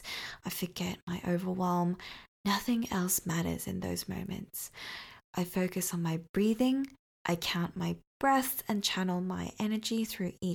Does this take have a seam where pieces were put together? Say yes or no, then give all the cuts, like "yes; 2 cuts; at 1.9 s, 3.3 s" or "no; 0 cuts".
no; 0 cuts